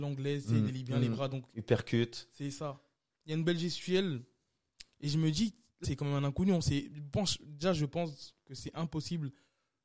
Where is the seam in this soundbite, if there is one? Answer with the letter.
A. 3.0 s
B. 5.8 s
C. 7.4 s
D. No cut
B